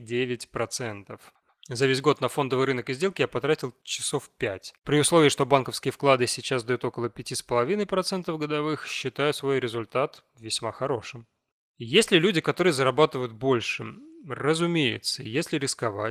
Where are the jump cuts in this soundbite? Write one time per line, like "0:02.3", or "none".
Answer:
0:04.8